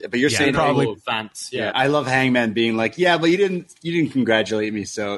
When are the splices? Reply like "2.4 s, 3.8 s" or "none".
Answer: 1.7 s